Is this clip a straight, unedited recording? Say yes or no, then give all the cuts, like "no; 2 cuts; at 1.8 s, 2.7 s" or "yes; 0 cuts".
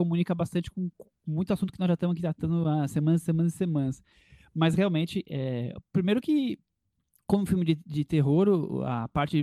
yes; 0 cuts